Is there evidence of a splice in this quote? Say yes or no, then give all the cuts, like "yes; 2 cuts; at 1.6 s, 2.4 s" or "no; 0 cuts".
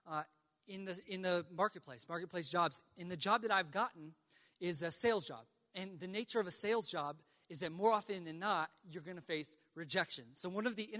no; 0 cuts